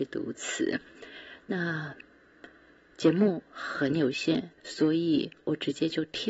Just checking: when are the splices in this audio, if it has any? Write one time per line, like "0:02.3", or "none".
0:04.6